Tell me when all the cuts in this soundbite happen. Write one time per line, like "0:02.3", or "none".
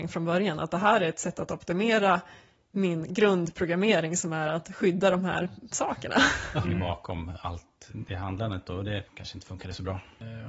0:06.6